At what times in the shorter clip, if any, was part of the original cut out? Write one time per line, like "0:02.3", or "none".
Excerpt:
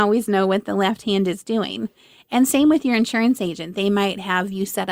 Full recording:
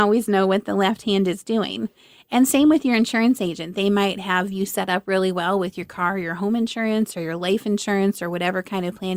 none